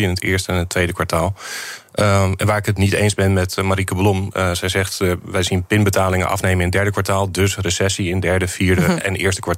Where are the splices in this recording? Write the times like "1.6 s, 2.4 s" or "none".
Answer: none